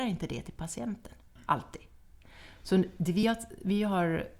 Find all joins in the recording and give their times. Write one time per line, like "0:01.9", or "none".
none